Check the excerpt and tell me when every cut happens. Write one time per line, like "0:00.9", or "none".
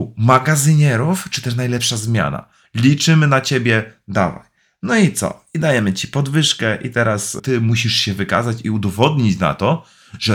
none

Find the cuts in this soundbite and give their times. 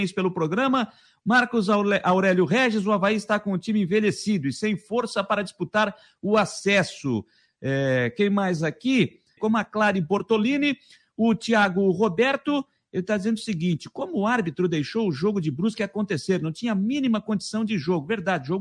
0:09.4

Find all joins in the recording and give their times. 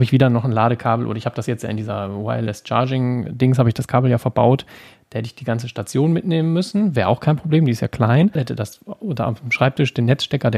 0:08.4

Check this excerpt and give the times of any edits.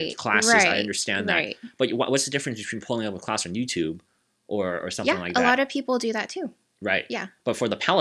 none

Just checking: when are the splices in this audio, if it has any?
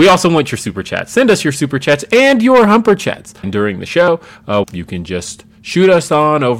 0:03.4
0:04.6

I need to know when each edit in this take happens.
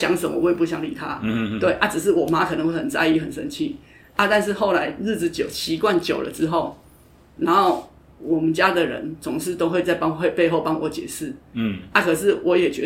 none

